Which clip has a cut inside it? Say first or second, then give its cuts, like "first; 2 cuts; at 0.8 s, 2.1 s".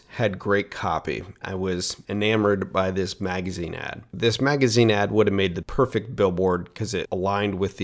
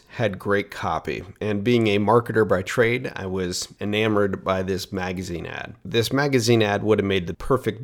first; 1 cut; at 1.4 s